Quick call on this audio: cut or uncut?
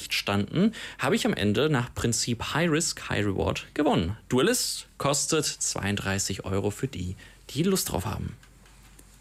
uncut